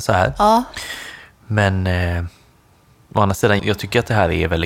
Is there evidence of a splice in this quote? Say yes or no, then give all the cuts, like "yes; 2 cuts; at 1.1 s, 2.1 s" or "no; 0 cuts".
yes; 1 cut; at 3.6 s